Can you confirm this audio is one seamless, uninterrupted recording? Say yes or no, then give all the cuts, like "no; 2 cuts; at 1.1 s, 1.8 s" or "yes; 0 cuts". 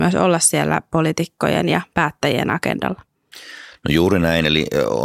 yes; 0 cuts